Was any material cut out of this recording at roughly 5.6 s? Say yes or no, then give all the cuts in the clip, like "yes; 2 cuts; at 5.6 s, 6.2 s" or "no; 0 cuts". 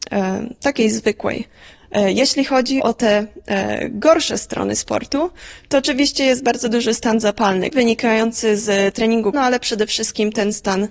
no; 3 cuts; at 2.8 s, 7.7 s, 9.3 s